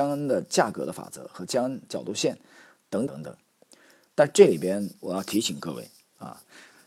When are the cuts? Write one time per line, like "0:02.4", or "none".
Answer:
0:03.1